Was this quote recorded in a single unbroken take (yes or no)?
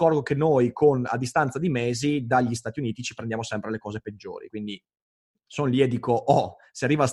yes